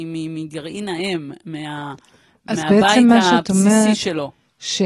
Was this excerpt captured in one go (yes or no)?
yes